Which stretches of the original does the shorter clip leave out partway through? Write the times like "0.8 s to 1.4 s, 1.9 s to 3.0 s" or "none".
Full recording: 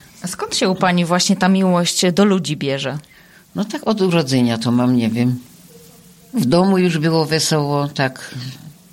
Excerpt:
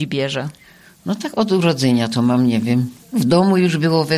5.5 s to 6.2 s